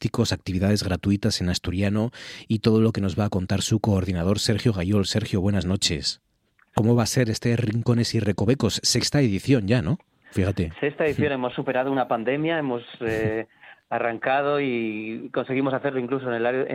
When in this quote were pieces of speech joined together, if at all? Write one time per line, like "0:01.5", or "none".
0:06.7
0:10.2